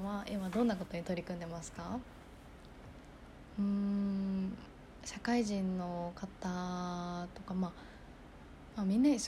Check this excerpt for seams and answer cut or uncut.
uncut